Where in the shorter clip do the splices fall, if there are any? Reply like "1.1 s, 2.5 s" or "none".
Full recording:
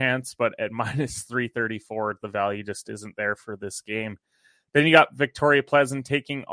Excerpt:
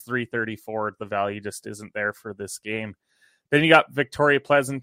none